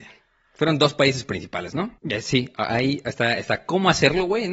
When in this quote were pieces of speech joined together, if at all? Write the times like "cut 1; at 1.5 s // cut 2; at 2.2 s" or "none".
cut 1; at 2.0 s